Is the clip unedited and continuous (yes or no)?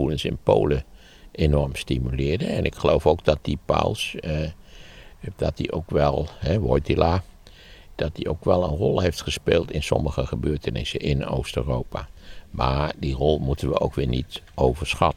yes